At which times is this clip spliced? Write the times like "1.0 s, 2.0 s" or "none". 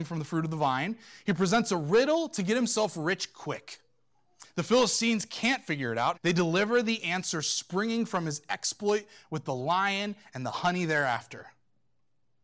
6.1 s